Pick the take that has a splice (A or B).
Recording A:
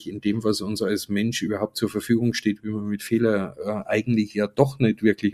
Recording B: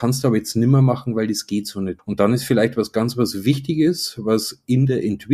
B